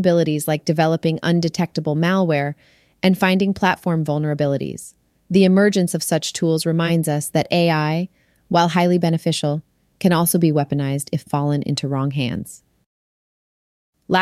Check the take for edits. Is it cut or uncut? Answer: uncut